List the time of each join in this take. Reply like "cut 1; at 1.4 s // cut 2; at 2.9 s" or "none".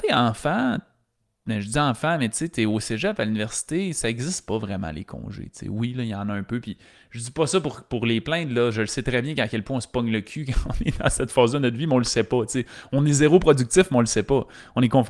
none